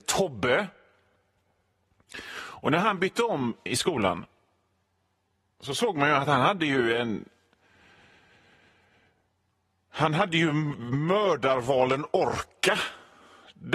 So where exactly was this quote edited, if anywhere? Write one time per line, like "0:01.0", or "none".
0:03.7